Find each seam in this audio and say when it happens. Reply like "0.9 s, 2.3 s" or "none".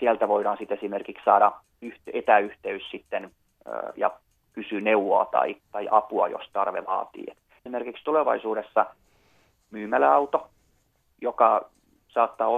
7.6 s